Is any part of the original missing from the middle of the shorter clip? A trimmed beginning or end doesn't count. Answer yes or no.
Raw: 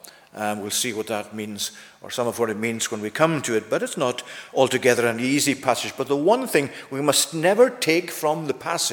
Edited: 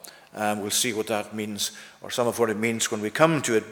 no